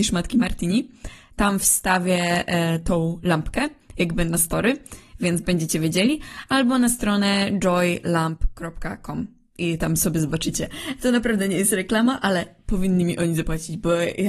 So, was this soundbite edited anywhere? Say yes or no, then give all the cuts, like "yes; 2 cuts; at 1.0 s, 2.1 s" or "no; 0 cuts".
no; 0 cuts